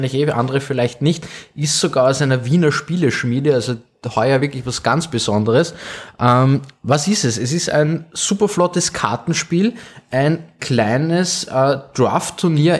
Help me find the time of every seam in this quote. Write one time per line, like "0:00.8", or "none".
none